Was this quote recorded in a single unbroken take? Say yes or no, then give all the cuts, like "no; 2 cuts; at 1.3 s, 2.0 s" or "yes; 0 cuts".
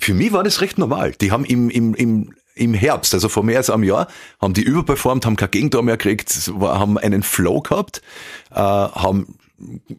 yes; 0 cuts